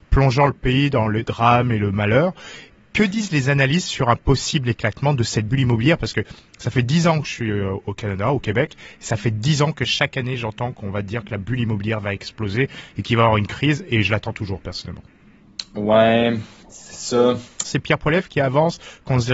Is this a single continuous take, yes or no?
no